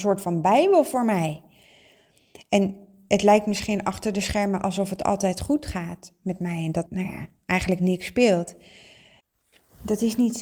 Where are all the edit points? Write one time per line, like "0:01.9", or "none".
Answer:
0:06.9